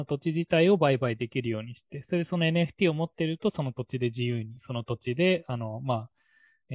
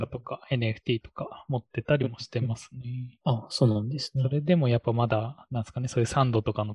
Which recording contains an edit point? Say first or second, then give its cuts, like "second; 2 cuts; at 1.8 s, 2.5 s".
second; 1 cut; at 3.2 s